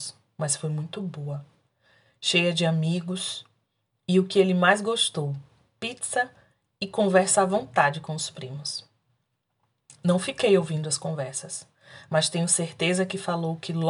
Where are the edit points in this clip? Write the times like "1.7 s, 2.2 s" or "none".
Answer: none